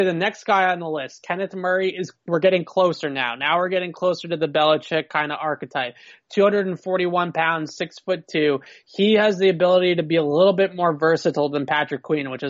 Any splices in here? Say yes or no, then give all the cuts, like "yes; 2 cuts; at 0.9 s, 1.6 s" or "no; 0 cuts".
no; 0 cuts